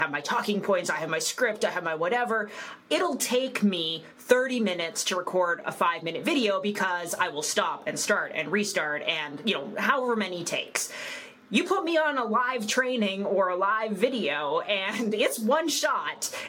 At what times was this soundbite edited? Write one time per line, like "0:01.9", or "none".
none